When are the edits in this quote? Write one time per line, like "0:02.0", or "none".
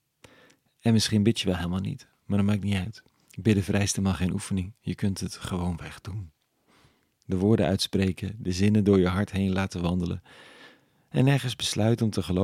none